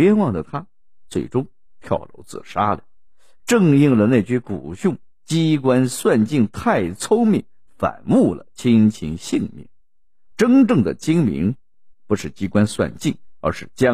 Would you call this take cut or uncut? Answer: uncut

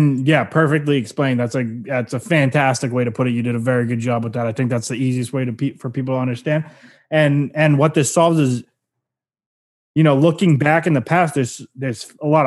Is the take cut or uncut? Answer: uncut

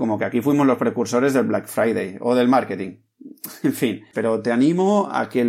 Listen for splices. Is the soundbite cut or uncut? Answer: cut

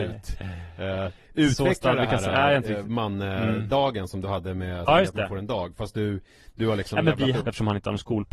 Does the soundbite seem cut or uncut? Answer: cut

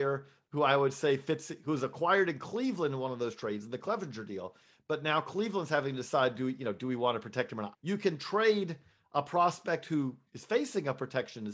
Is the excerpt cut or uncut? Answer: cut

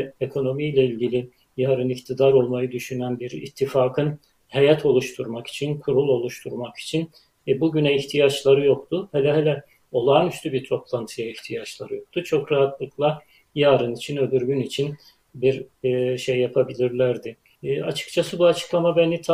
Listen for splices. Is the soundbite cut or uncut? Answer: cut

